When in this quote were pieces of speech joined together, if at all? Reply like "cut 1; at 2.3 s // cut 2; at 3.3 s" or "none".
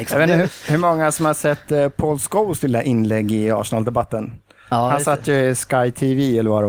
none